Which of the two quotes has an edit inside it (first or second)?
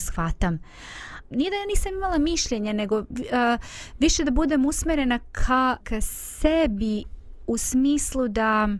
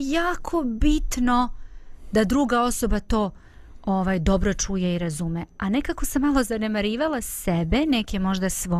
first